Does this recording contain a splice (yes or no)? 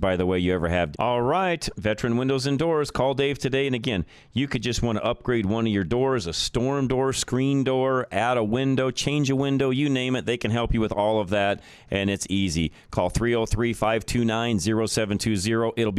yes